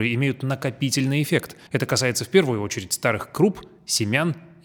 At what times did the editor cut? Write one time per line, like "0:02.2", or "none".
0:01.7